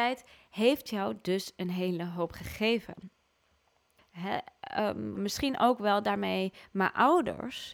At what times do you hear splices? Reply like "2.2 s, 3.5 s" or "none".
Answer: 4.0 s, 5.2 s